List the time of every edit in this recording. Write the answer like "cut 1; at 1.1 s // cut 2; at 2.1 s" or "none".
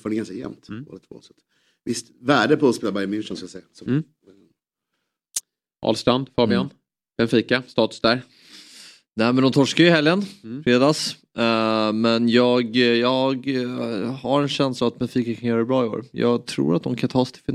none